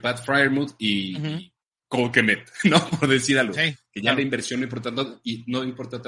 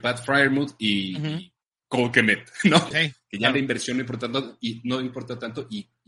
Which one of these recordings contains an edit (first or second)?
second